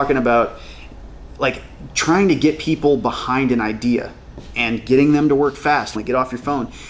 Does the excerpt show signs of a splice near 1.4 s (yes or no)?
no